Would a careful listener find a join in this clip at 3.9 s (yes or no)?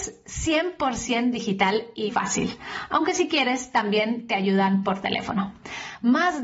no